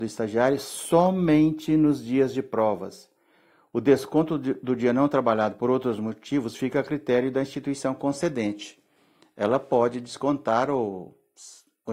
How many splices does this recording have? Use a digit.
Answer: 0